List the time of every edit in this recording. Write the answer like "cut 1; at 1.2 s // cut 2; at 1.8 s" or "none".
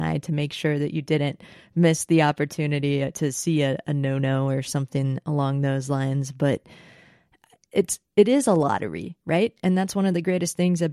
none